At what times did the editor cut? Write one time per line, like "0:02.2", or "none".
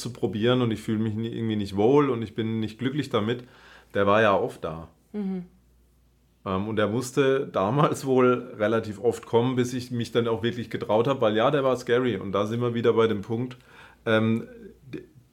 none